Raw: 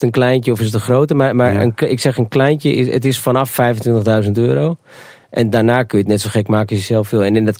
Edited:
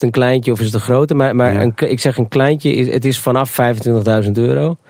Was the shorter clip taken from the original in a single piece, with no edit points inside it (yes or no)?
yes